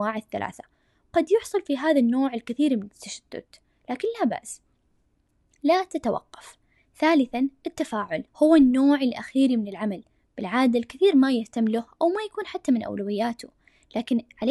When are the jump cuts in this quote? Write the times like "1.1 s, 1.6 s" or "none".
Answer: 8.3 s